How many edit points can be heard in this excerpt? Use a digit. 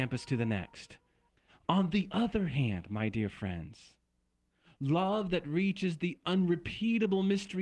0